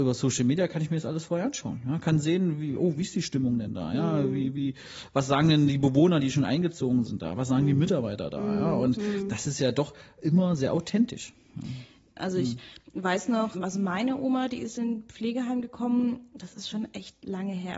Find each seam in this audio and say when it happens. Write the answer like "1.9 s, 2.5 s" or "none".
12.2 s, 13.5 s